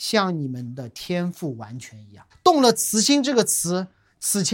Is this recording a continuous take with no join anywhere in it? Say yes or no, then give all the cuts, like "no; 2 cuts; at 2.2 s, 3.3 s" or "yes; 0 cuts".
no; 1 cut; at 2.3 s